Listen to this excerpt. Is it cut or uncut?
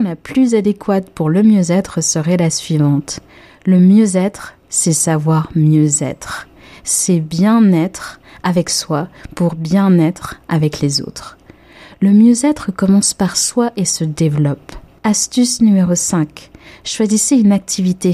cut